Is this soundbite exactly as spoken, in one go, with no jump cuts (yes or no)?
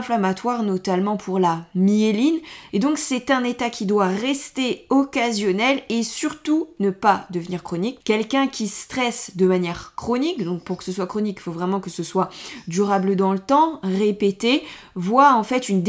no